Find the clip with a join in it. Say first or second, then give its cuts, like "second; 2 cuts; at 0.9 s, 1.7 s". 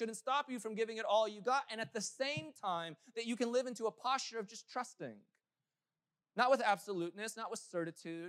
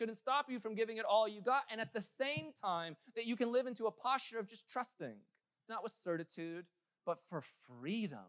second; 1 cut; at 5.7 s